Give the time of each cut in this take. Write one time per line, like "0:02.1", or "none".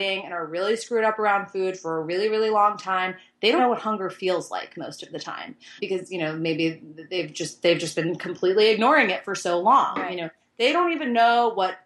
0:03.6
0:05.8